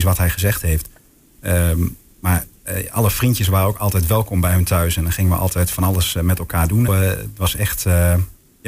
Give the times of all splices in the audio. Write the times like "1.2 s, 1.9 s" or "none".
6.9 s